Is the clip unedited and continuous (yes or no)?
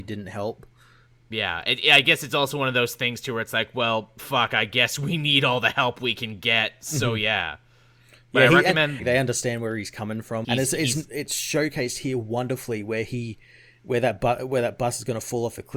no